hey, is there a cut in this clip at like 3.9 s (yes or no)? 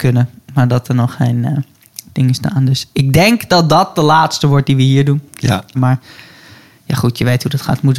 no